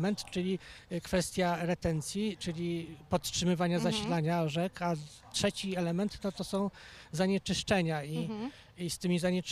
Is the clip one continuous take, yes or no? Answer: yes